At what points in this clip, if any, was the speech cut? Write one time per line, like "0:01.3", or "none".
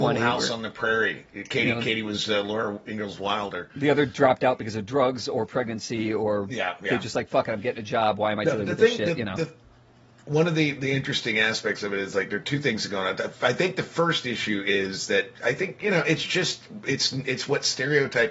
none

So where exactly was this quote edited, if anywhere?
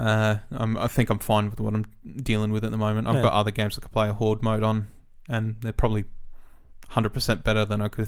none

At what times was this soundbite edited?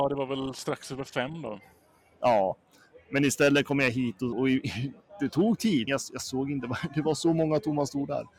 0:04.3
0:05.9

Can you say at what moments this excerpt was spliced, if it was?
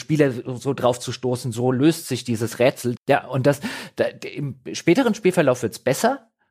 0:03.0

